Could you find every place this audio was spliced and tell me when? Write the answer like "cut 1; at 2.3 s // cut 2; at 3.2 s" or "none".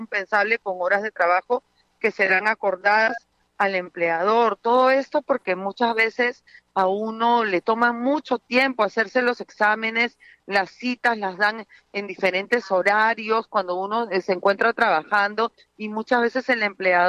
none